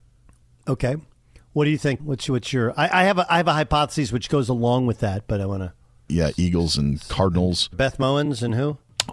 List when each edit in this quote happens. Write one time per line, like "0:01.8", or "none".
0:02.0
0:06.1
0:07.7